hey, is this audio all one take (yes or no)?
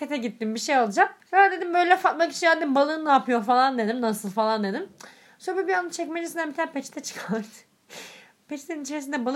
no